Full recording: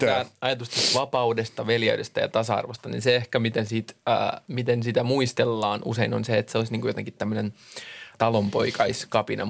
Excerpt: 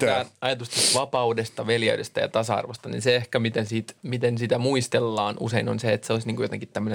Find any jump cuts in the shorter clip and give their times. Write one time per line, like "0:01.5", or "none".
0:04.0